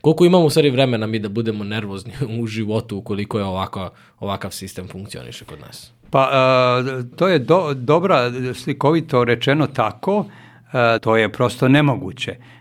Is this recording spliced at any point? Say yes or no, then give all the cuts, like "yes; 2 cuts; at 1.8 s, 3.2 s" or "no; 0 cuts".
yes; 2 cuts; at 7.1 s, 11.0 s